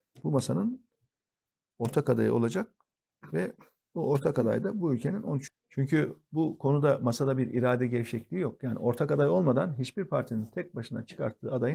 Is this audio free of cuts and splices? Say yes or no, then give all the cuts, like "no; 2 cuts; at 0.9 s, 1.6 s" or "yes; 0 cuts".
no; 1 cut; at 5.5 s